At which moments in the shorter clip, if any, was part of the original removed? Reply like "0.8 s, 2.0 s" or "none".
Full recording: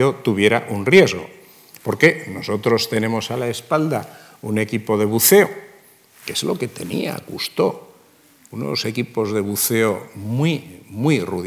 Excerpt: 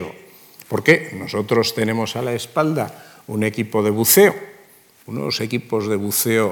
5.0 s